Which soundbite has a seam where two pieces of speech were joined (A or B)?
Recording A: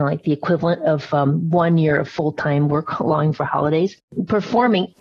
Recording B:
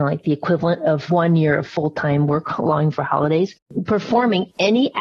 B